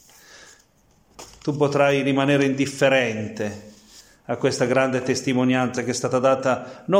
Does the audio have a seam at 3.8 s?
no; 0 cuts

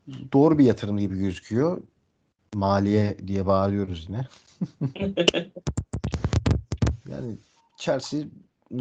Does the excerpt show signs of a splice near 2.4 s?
yes; 1 cut; at 2.4 s

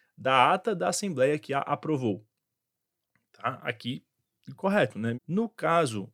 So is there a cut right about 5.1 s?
yes; 1 cut; at 5.1 s

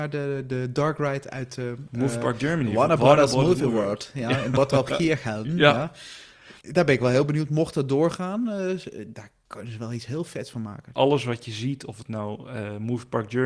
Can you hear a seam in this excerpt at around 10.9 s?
yes; 2 cuts; at 6.6 s, 10.9 s

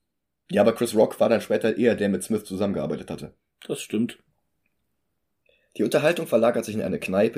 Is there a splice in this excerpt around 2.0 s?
yes; 1 cut; at 2.0 s

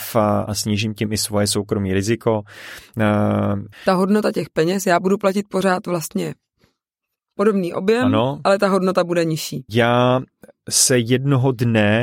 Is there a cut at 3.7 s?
yes; 2 cuts; at 3.7 s, 9.7 s

